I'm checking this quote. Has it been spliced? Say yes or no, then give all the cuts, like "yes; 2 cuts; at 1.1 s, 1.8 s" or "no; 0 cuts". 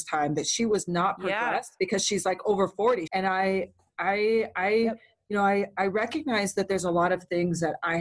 yes; 1 cut; at 3.1 s